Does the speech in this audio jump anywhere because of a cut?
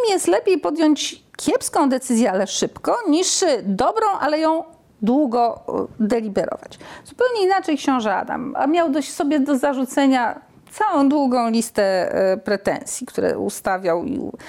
yes; 1 cut; at 8.5 s

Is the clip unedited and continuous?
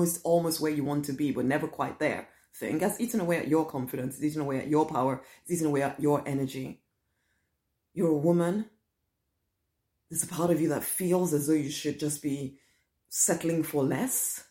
yes; 0 cuts

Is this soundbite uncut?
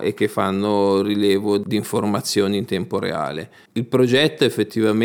yes; 0 cuts

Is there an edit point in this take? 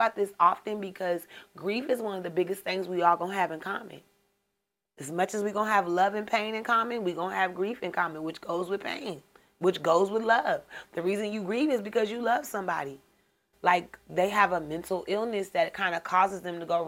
yes; 1 cut; at 13.5 s

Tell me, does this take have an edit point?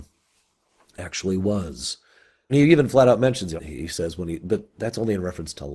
yes; 2 cuts; at 2.5 s, 3.6 s

